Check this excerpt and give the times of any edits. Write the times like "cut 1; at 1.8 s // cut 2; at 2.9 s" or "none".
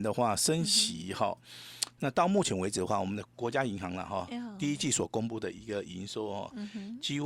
cut 1; at 3.3 s